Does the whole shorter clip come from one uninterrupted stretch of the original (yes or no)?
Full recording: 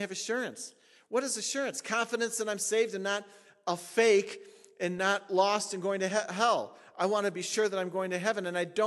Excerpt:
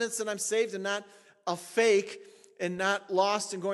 yes